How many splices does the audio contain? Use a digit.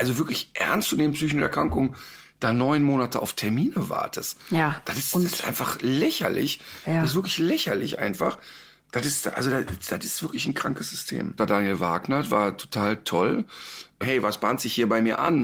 2